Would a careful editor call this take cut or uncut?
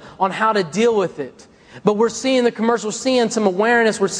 uncut